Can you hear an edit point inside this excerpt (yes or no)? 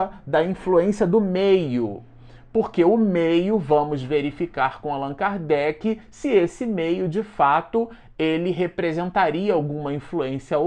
no